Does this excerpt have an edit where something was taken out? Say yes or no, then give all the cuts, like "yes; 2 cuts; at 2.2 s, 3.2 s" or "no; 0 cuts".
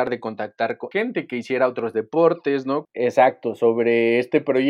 yes; 2 cuts; at 0.9 s, 2.8 s